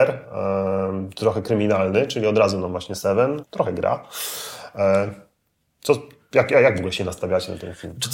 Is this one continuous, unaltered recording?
no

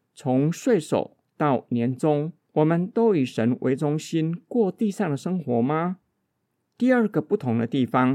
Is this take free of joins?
yes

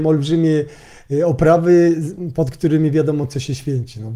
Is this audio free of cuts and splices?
yes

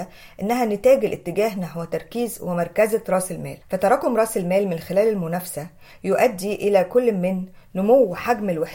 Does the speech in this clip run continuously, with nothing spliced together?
no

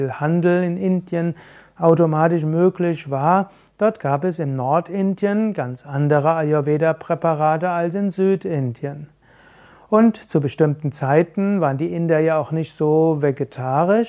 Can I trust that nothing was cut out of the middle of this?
yes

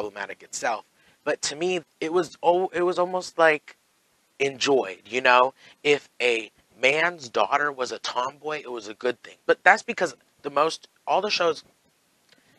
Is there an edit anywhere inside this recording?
yes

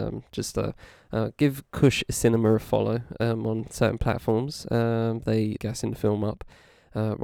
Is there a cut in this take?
yes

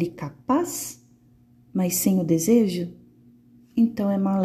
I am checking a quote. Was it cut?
no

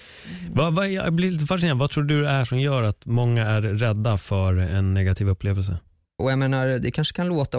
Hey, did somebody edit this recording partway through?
yes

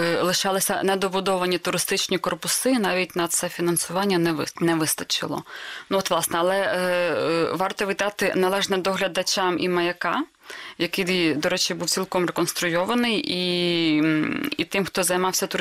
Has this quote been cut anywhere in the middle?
no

